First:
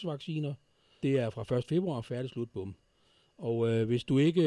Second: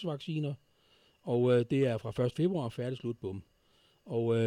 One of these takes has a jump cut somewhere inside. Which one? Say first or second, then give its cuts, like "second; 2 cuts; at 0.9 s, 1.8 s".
first; 1 cut; at 1.0 s